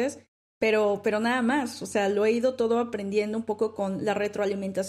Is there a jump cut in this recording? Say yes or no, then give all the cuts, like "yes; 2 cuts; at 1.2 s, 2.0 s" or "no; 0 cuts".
no; 0 cuts